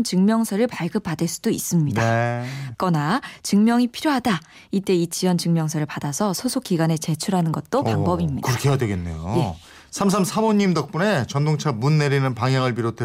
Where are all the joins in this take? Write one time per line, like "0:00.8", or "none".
0:02.7